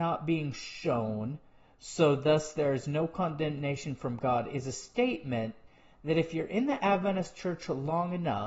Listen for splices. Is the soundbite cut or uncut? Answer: uncut